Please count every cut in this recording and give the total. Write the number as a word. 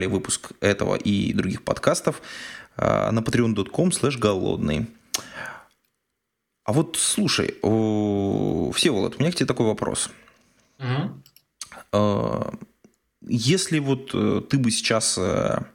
zero